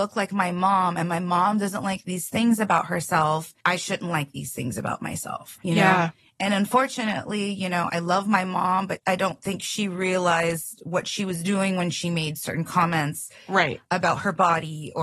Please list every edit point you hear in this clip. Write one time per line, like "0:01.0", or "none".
0:03.6